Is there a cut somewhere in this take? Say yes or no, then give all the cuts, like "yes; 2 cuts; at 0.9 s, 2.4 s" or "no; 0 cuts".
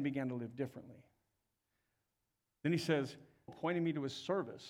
yes; 1 cut; at 3.5 s